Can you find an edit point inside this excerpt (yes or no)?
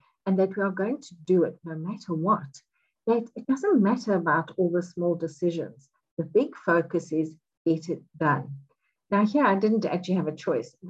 no